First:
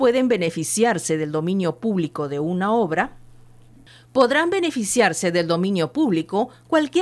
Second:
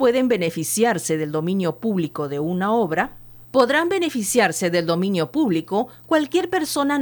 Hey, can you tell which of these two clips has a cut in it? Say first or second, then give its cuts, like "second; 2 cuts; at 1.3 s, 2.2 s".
second; 1 cut; at 3.4 s